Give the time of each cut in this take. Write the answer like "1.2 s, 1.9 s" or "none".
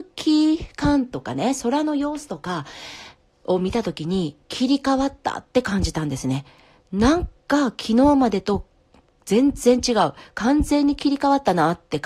none